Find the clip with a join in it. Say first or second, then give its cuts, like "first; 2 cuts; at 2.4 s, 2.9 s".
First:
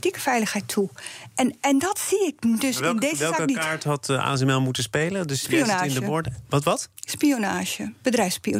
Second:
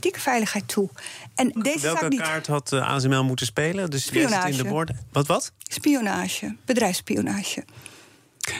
second; 1 cut; at 1.6 s